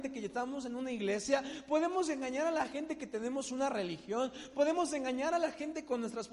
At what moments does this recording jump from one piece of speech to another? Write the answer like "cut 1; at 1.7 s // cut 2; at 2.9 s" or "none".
cut 1; at 4.5 s